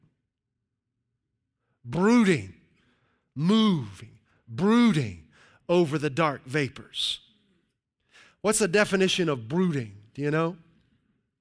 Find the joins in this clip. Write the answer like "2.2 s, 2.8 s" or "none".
none